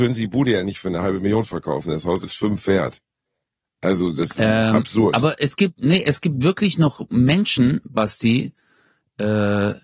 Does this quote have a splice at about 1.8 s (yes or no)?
no